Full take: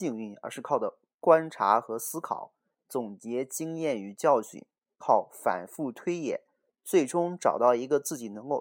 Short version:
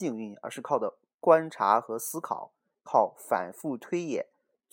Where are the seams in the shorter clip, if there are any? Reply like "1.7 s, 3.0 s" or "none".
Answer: 2.7 s